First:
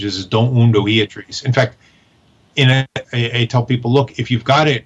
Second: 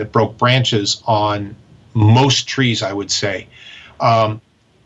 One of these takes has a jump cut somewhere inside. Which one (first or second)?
first